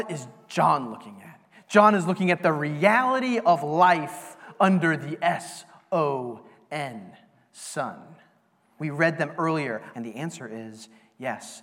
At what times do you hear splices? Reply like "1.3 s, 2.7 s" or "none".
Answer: 8.8 s, 9.9 s